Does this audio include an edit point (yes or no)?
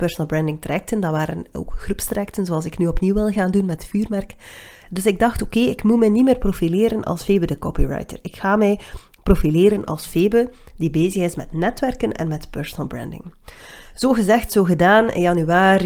yes